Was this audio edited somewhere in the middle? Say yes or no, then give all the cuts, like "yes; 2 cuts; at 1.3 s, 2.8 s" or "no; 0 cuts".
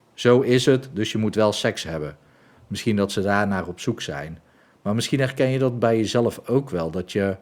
no; 0 cuts